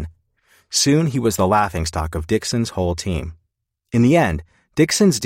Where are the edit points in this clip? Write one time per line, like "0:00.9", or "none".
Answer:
none